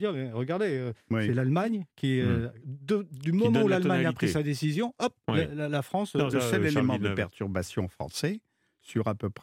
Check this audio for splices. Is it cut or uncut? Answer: cut